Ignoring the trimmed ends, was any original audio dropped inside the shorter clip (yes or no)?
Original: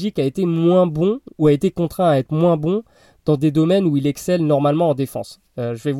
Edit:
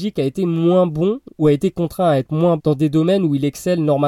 yes